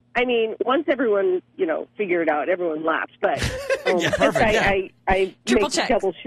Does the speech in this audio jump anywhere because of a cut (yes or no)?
yes